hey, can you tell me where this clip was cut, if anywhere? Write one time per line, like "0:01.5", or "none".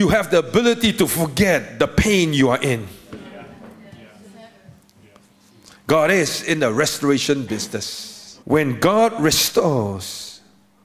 0:08.4